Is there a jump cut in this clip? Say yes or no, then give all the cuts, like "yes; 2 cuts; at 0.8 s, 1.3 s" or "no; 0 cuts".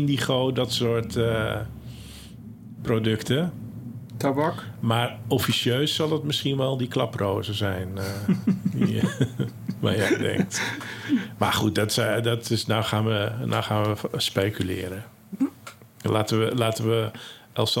no; 0 cuts